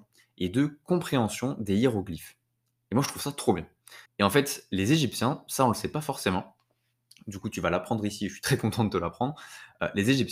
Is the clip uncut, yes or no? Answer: no